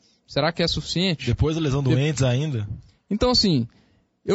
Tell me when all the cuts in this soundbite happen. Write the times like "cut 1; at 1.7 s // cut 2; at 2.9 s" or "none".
none